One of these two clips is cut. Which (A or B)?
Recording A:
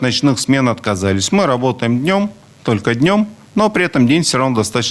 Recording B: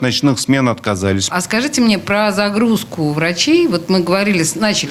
B